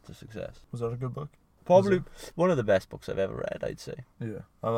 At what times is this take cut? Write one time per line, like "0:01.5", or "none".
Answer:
0:01.6

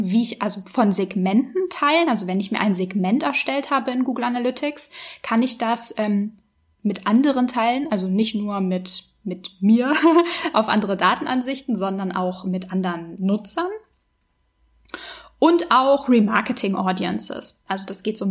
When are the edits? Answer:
none

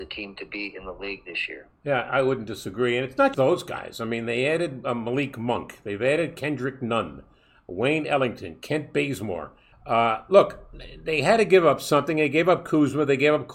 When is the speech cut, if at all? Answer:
0:03.3
0:09.7

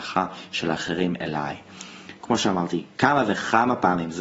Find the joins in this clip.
0:02.2

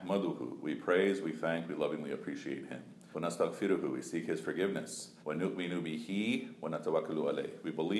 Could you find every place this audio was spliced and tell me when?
0:03.1
0:05.2

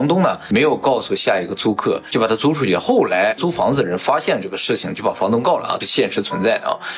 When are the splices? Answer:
0:05.8

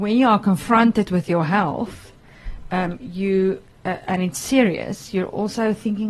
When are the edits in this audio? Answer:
none

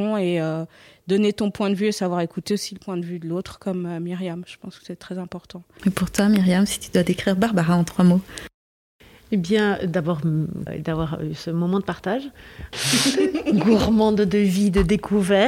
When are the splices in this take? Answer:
0:05.8
0:10.7
0:12.7

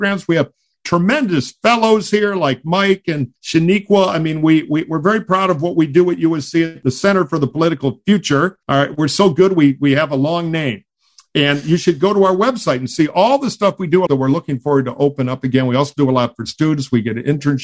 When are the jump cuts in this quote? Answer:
0:08.6
0:14.1

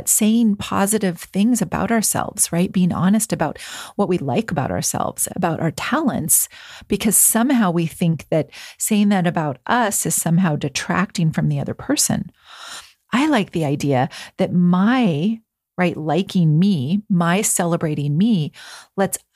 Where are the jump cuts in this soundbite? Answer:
0:05.3

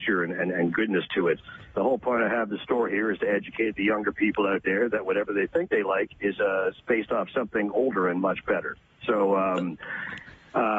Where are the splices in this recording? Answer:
0:01.7

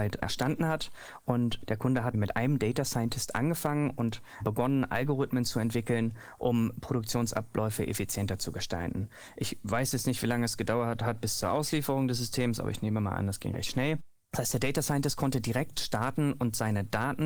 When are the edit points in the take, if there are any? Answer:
none

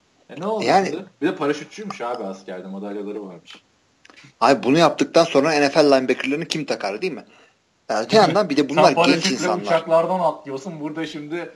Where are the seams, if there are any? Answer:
none

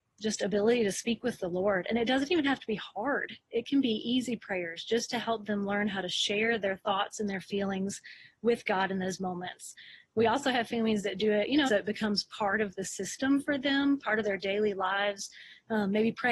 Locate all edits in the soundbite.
0:11.7

